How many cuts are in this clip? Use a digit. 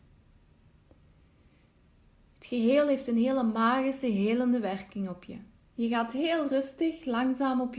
1